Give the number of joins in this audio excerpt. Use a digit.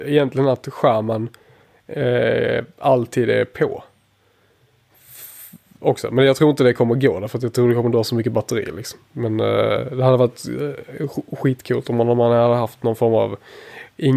0